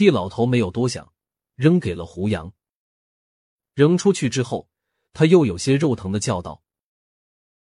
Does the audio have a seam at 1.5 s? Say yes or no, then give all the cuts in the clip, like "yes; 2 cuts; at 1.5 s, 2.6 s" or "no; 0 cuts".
yes; 1 cut; at 1.5 s